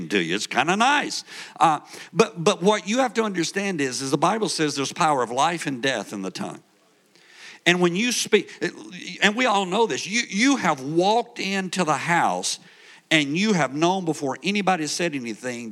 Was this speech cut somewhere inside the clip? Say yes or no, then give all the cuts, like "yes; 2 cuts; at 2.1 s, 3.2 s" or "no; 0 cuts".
no; 0 cuts